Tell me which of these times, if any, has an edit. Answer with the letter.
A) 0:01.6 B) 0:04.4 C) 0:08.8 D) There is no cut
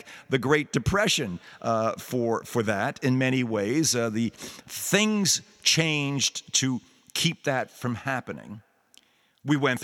B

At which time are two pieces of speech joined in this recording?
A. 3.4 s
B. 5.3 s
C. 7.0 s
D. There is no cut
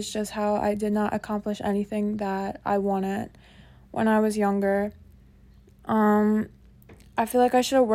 D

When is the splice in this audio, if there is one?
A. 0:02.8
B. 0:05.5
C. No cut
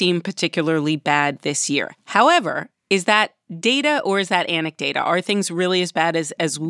A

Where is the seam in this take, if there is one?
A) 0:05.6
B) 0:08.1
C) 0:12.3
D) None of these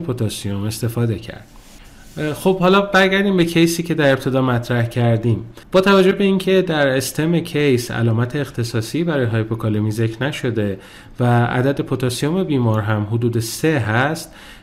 A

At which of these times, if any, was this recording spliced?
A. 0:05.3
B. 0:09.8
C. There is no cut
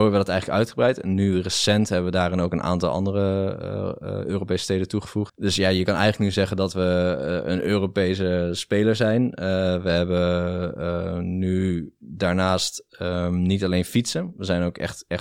A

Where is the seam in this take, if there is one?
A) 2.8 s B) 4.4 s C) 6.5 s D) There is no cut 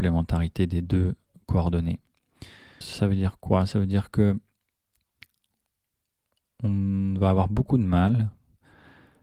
A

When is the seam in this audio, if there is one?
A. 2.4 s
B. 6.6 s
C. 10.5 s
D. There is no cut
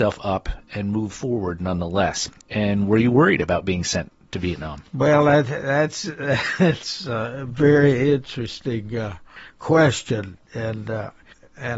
A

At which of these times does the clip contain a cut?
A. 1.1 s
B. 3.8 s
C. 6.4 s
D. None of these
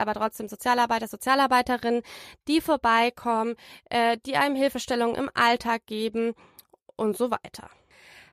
D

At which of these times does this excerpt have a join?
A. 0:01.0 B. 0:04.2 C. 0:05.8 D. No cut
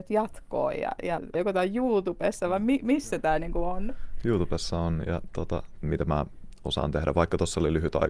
C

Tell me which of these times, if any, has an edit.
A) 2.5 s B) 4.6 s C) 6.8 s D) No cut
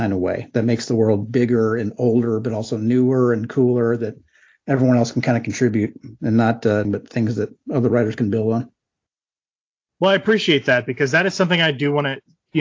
C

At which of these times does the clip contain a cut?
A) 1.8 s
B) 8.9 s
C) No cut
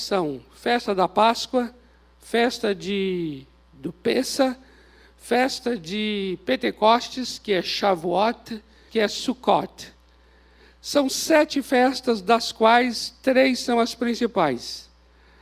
B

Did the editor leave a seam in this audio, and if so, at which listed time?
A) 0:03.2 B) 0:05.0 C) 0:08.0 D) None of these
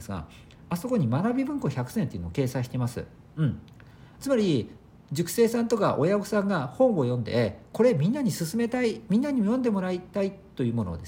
D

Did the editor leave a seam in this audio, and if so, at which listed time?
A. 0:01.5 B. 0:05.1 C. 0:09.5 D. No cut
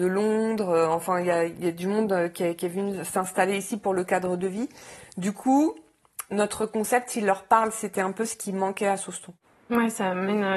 A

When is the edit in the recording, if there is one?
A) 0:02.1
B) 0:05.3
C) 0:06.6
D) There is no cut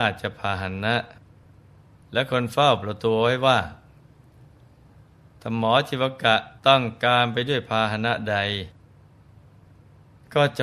C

